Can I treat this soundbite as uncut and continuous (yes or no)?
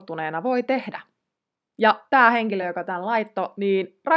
yes